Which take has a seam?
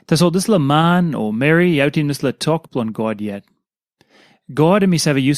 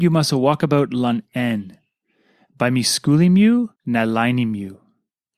second; 1 cut; at 3.8 s

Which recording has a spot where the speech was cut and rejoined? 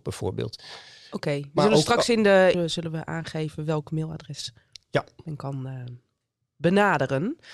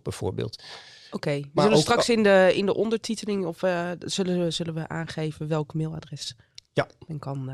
first; 1 cut; at 2.5 s

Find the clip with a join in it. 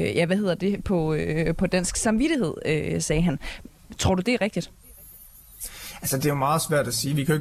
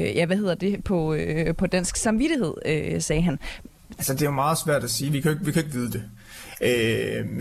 second; 1 cut; at 4.0 s

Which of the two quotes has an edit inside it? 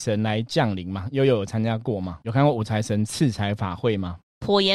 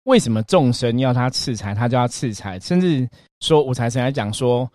first; 1 cut; at 2.2 s

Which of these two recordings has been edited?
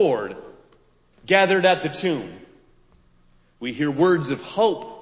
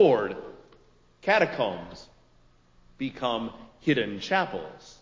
first; 1 cut; at 1.1 s

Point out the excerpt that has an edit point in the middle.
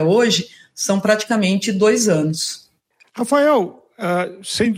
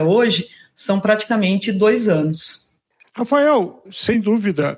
second; 1 cut; at 3.9 s

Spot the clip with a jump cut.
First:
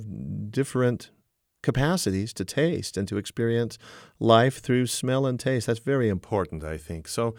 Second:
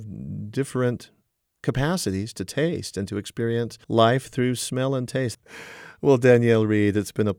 second; 2 cuts; at 3.8 s, 5.3 s

